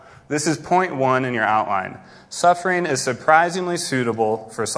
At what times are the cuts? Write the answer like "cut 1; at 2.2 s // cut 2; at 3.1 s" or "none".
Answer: none